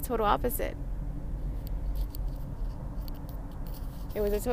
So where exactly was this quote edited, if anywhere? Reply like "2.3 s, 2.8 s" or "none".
none